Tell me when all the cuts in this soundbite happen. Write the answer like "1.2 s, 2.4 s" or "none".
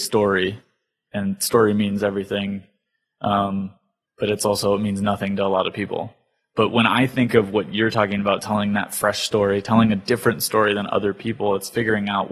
1.1 s